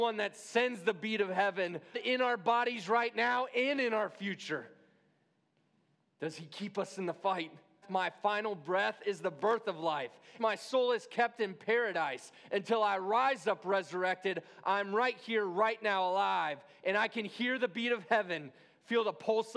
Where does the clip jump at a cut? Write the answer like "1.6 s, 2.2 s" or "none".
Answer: 1.9 s, 7.8 s, 10.4 s